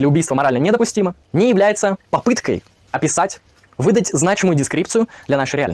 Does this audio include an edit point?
yes; 1 cut; at 1.2 s

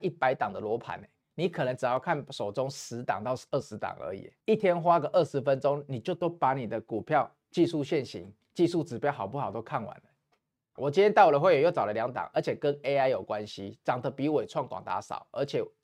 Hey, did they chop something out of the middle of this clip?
yes; 2 cuts; at 4.4 s, 10.8 s

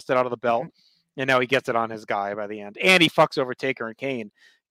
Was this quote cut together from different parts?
no; 0 cuts

